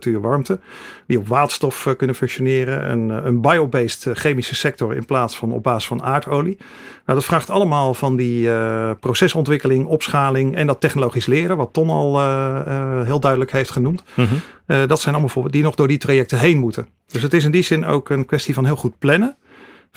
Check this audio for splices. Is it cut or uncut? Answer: uncut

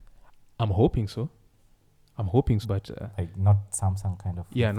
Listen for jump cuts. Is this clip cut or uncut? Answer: cut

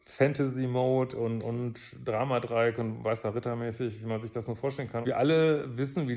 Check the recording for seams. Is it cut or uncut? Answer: cut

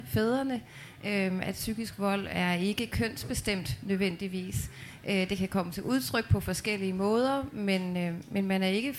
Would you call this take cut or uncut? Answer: uncut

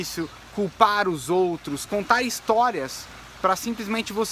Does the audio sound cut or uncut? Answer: cut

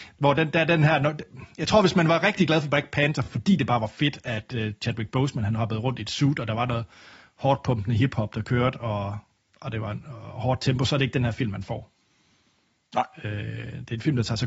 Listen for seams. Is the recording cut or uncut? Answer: uncut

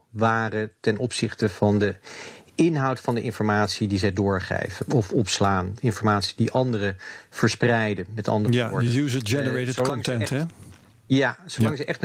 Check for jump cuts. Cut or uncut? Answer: uncut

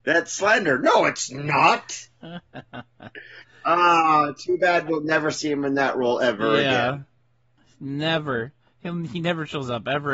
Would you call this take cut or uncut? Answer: uncut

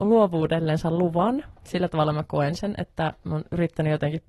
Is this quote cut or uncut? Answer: uncut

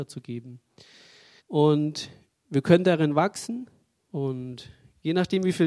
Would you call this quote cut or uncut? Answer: cut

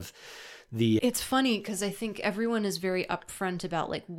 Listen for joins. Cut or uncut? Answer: cut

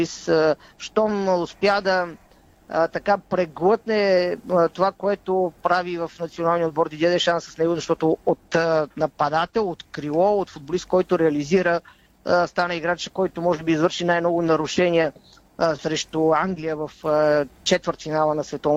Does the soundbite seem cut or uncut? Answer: uncut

